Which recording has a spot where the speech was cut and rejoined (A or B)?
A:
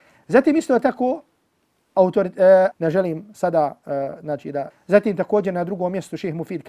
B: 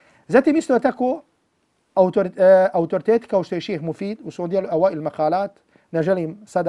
A